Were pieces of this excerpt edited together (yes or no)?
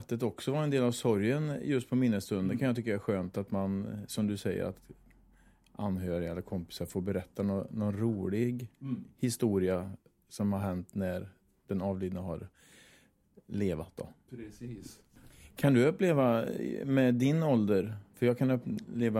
no